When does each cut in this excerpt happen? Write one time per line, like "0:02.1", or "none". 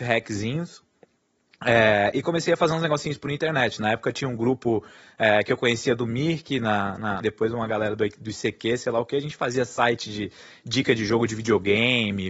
0:07.2